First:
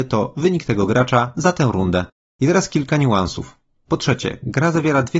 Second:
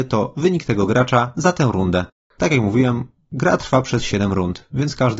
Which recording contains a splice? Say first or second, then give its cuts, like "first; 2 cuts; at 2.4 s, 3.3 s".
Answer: first; 2 cuts; at 2.2 s, 3.8 s